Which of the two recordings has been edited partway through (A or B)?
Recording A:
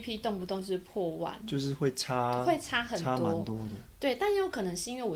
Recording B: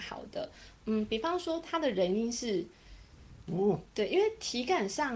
B